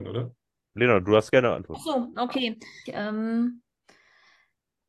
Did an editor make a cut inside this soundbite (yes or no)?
yes